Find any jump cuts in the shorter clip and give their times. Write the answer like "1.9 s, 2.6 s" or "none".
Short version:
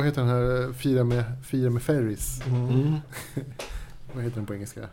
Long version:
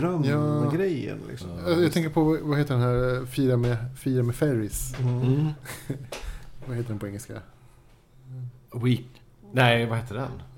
none